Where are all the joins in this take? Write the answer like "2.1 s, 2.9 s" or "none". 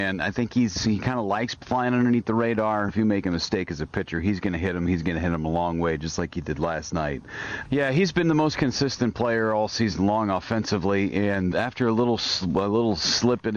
2.9 s, 7.6 s, 11.5 s